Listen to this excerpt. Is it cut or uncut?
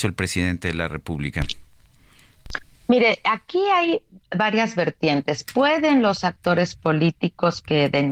uncut